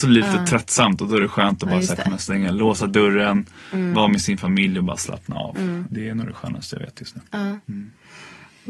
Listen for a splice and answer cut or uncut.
uncut